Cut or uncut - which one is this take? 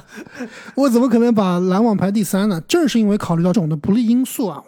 cut